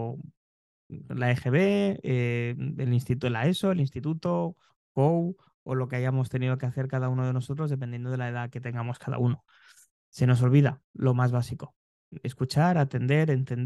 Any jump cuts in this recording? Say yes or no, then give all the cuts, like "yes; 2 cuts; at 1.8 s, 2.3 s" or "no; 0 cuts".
yes; 1 cut; at 4.7 s